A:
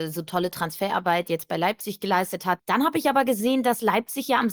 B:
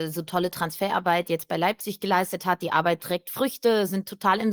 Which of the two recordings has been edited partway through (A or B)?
A